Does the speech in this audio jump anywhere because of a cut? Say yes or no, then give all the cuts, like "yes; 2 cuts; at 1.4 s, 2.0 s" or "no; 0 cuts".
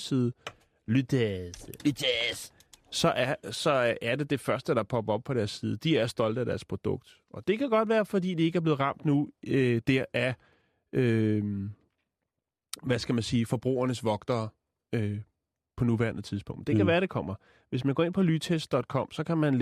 no; 0 cuts